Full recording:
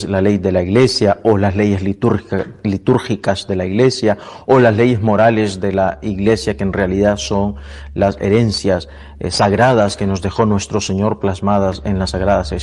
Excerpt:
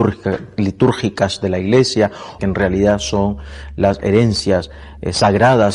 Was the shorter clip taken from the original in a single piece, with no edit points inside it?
no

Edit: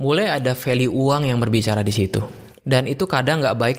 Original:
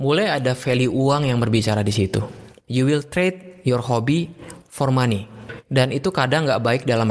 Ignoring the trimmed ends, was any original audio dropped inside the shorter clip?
yes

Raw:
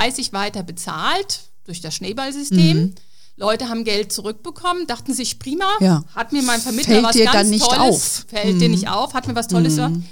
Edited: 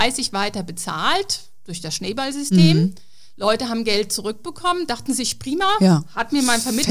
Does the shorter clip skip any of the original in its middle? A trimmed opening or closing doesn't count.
no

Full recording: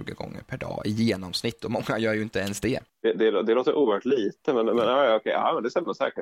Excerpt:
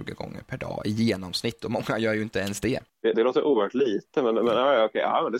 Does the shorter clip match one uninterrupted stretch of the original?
no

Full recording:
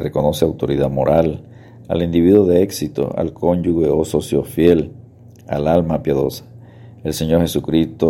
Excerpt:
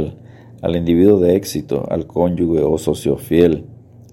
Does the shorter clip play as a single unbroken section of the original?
yes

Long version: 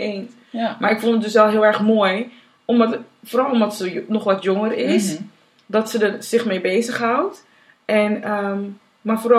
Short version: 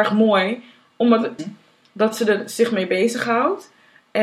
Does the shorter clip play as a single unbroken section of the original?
no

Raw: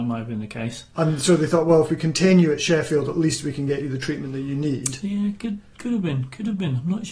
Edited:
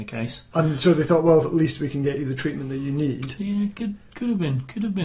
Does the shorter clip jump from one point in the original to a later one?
yes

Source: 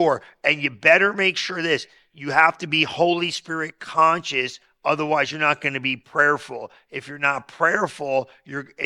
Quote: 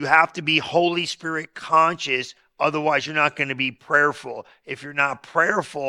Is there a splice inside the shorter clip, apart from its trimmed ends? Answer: no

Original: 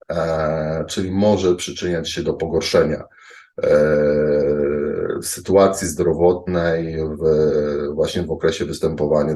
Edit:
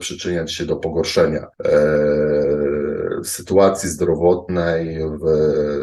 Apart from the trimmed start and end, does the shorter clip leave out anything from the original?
yes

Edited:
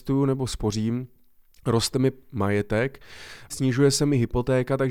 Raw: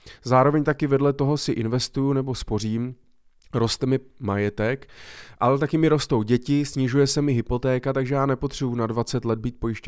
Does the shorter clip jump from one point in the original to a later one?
yes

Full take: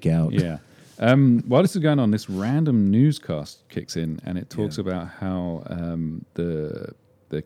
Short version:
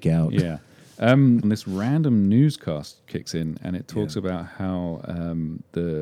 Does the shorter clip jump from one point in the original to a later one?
yes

